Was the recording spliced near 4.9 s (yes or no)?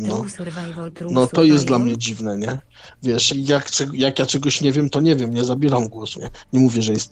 no